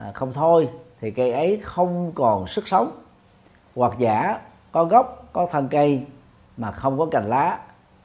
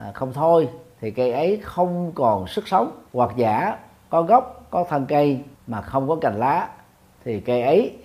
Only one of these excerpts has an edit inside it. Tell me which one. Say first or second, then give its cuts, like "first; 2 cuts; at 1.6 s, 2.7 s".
second; 2 cuts; at 3.1 s, 5.5 s